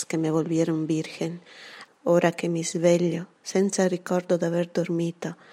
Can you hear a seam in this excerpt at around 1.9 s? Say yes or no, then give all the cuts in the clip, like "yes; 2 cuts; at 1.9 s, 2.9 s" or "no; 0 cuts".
yes; 1 cut; at 1.9 s